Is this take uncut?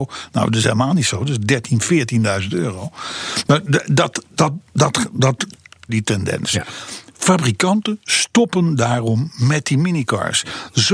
no; 1 cut; at 5.9 s

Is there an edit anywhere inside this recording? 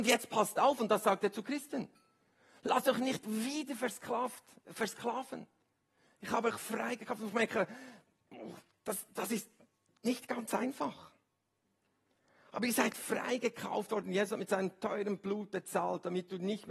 no; 0 cuts

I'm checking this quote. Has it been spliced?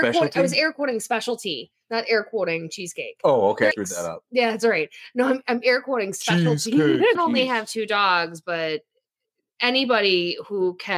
yes; 2 cuts; at 3.7 s, 7.2 s

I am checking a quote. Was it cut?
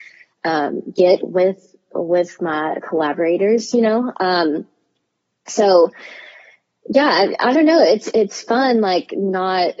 no; 0 cuts

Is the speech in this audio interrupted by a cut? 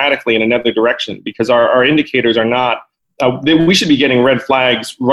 no; 0 cuts

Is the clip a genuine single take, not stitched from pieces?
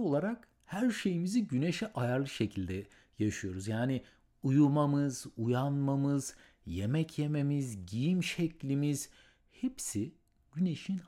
yes; 0 cuts

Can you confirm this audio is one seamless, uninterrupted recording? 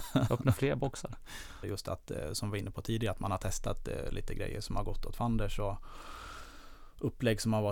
no; 1 cut; at 1.6 s

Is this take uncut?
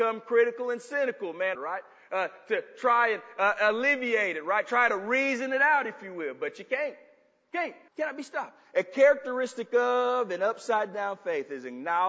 no; 2 cuts; at 1.5 s, 7.9 s

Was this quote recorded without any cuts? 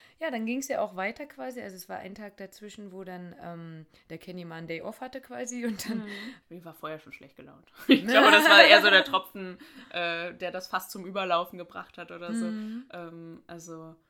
no; 1 cut; at 6.4 s

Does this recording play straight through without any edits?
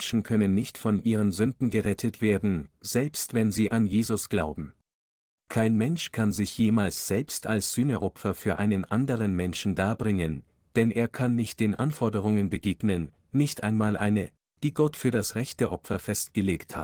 no; 1 cut; at 5.4 s

